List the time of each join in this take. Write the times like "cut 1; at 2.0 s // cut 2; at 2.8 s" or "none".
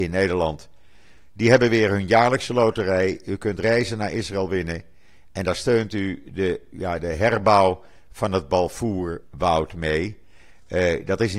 cut 1; at 6.7 s